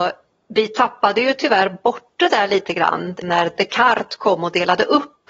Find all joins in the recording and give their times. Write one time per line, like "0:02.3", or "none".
none